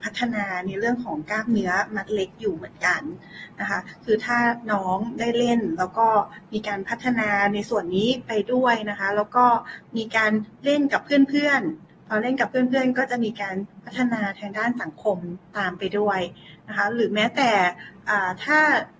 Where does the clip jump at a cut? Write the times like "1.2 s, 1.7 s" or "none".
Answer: none